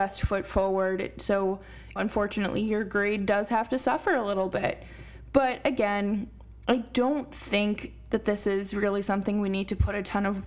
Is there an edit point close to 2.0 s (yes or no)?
yes